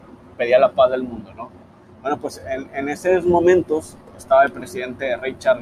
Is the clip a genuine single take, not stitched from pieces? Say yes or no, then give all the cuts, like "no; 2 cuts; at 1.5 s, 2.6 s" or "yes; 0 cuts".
yes; 0 cuts